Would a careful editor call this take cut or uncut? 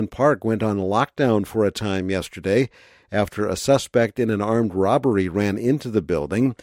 uncut